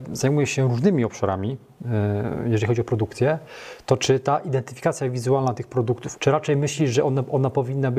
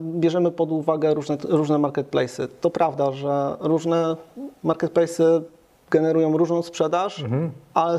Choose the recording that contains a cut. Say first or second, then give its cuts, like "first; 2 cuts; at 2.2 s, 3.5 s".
first; 1 cut; at 6.2 s